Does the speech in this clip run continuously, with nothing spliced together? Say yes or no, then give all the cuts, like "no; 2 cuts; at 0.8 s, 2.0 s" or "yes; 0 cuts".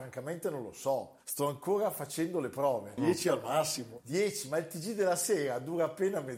no; 1 cut; at 3.0 s